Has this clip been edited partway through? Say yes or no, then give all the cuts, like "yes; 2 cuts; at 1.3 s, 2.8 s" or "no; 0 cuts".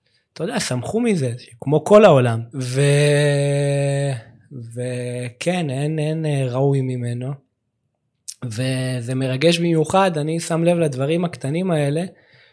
yes; 1 cut; at 2.5 s